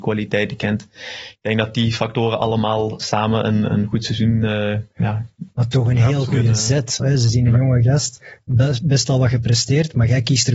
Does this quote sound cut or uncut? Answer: cut